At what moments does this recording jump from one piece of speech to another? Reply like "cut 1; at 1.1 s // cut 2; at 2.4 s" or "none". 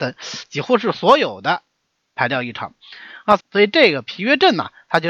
cut 1; at 3.4 s